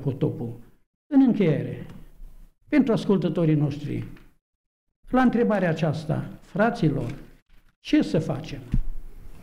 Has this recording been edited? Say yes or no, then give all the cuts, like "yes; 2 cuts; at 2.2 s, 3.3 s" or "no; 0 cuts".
no; 0 cuts